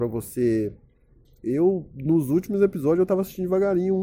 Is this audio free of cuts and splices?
no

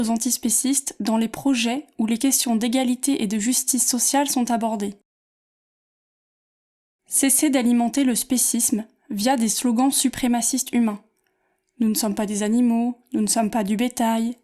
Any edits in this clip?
no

